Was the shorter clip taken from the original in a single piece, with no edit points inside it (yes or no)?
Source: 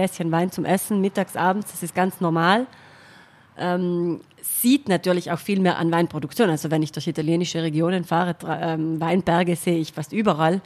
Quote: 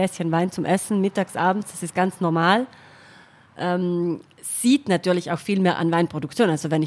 yes